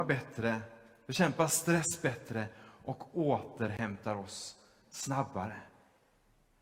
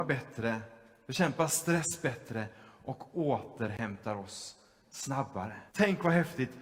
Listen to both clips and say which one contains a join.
second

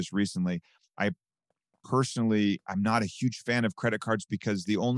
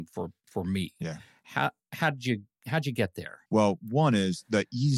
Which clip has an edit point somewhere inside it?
second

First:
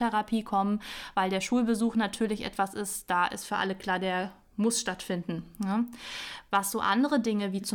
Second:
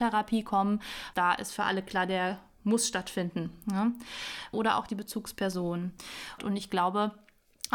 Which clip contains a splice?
second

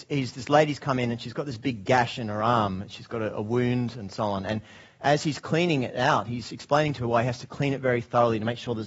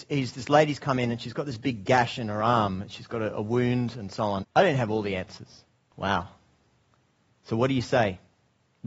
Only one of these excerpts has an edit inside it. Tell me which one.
second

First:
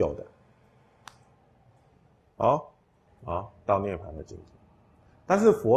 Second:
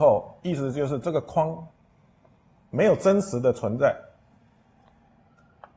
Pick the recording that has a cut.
first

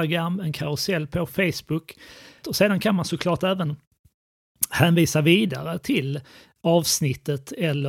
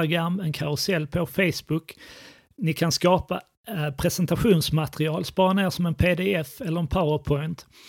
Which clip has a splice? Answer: first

